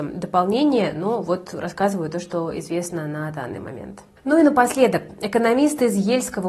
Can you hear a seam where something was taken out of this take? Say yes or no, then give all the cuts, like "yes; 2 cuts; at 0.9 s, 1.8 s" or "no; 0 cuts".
no; 0 cuts